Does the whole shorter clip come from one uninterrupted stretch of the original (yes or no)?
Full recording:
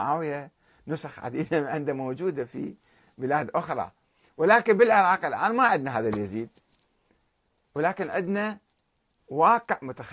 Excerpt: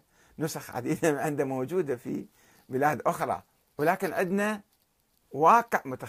no